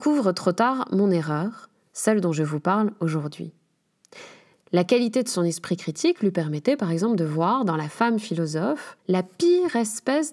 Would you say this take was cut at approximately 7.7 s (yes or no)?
no